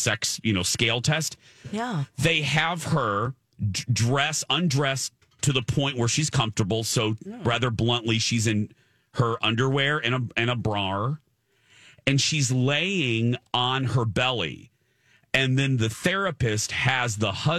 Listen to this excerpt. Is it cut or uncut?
uncut